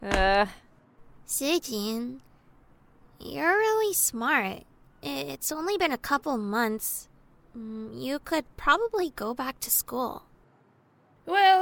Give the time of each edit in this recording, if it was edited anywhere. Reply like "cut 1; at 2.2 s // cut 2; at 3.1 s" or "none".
none